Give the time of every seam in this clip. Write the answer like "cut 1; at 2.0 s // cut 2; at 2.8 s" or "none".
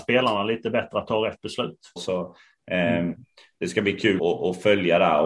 cut 1; at 2.0 s // cut 2; at 4.2 s